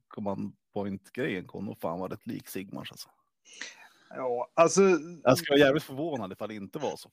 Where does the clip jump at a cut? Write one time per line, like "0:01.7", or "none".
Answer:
none